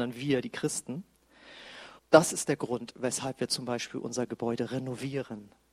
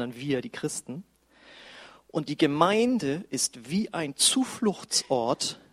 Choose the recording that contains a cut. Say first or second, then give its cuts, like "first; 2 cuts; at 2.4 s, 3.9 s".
first; 1 cut; at 2.0 s